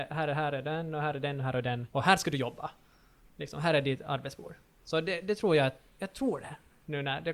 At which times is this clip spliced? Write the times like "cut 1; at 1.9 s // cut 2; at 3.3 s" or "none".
cut 1; at 1.9 s